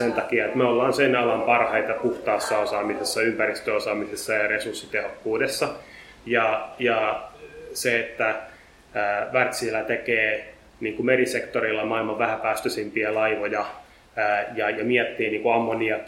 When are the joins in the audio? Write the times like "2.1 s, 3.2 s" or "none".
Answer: none